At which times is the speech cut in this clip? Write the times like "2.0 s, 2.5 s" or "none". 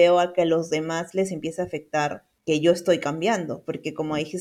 none